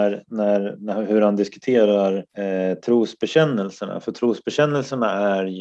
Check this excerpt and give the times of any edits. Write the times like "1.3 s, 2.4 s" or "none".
2.3 s

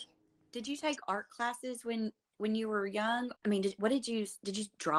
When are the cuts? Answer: none

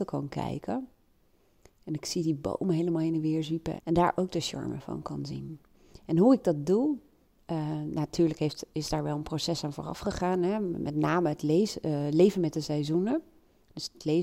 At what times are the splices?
3.8 s

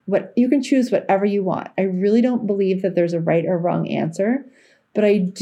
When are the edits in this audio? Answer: none

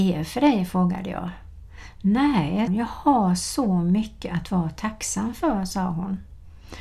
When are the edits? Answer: 2.7 s

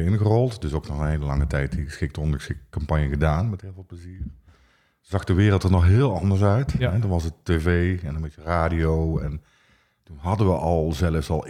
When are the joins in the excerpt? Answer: none

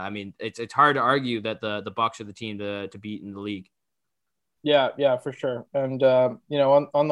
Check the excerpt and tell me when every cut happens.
none

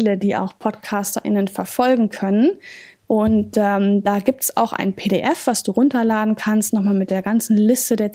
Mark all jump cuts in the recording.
3.0 s

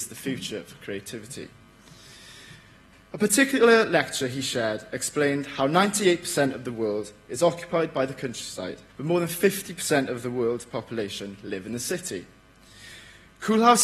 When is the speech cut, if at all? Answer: 2.9 s, 8.9 s

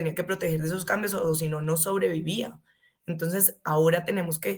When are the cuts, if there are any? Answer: none

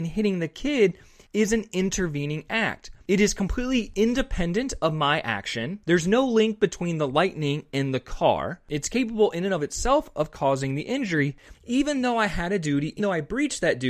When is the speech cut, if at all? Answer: 11.5 s, 13.0 s

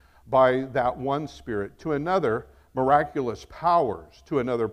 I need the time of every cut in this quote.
none

